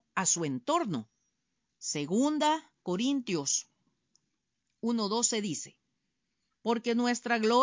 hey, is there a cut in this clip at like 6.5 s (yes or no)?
no